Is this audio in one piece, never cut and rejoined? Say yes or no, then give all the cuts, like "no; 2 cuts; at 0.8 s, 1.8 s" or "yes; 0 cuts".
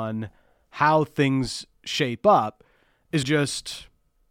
no; 1 cut; at 3.2 s